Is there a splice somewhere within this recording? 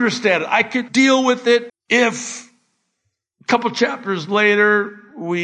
yes; 1 cut; at 1.7 s

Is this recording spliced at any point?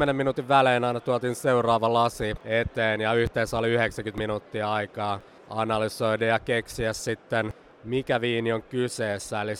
no; 0 cuts

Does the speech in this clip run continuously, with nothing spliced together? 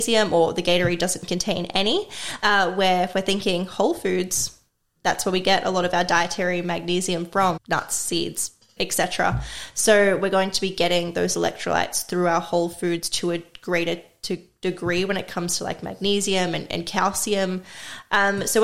no; 2 cuts; at 7.6 s, 8.8 s

